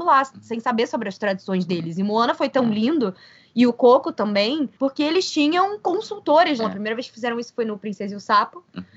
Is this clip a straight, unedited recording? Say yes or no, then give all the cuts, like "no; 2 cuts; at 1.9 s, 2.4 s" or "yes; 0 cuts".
no; 2 cuts; at 4.8 s, 6.6 s